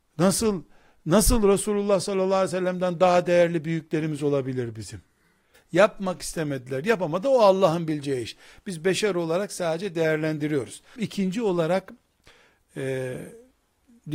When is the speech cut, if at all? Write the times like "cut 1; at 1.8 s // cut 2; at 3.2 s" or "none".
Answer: cut 1; at 5.5 s // cut 2; at 11.0 s